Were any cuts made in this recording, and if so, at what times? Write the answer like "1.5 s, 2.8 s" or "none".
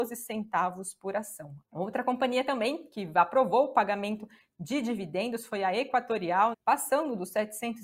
1.6 s, 6.5 s